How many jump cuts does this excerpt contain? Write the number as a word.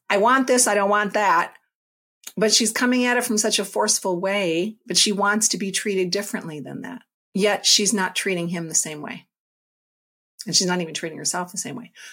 one